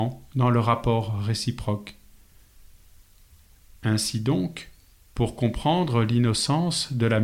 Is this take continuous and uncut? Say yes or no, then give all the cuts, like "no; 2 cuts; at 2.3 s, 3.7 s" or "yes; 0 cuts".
yes; 0 cuts